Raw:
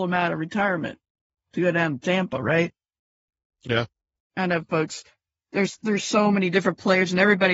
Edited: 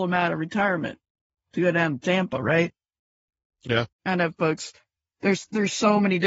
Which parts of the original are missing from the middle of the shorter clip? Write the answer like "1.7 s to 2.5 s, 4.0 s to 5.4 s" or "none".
3.9 s to 4.2 s